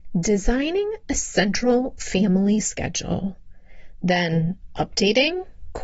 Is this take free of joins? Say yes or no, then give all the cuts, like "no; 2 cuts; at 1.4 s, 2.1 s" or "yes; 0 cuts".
yes; 0 cuts